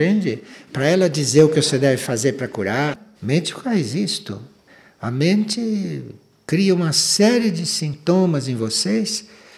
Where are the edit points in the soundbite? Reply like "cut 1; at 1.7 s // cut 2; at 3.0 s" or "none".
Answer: cut 1; at 3.1 s